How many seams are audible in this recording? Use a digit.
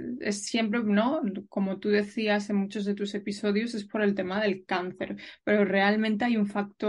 0